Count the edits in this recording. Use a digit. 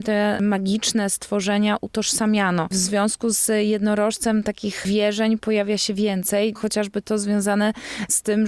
0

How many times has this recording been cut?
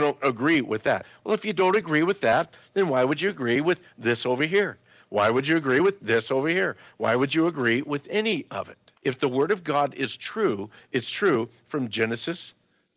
1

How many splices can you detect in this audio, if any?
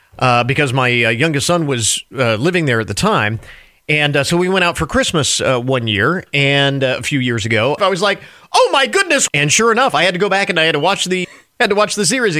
3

